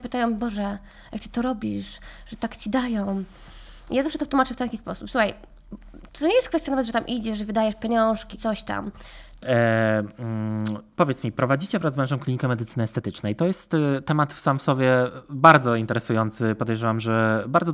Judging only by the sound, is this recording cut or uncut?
cut